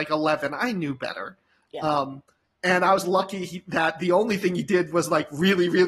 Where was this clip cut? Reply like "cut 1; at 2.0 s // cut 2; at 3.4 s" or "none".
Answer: none